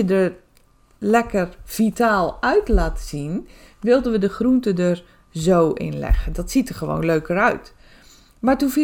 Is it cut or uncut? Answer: uncut